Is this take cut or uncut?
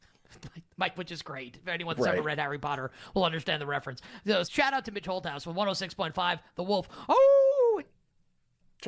cut